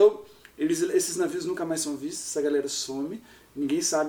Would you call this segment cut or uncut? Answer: uncut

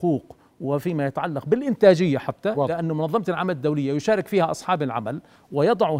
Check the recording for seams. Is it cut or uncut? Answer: uncut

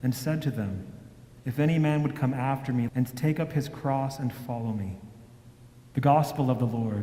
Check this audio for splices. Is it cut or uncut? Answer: cut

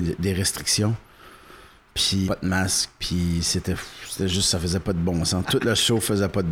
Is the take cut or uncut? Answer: cut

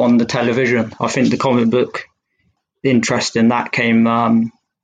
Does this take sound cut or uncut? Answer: uncut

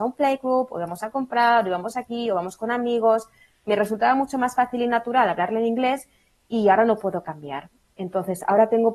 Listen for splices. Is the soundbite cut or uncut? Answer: uncut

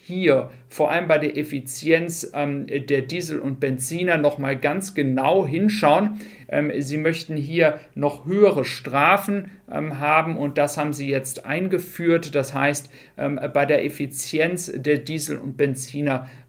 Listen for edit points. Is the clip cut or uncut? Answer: uncut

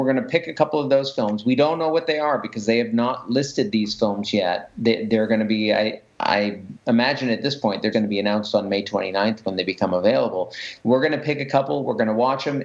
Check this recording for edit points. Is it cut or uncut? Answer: cut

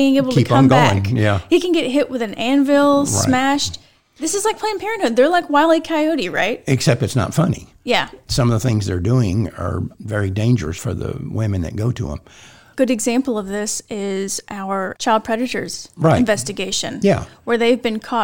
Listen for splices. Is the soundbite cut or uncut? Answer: uncut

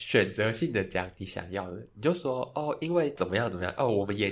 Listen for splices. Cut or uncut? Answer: uncut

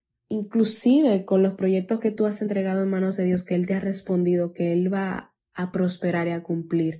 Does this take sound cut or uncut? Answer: uncut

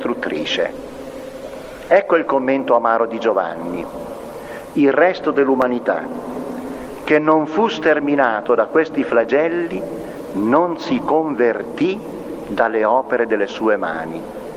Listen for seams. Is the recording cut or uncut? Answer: uncut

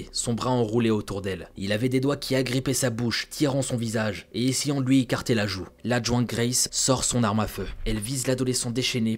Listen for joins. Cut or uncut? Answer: cut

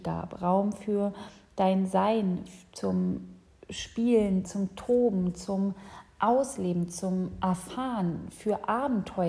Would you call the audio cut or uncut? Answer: cut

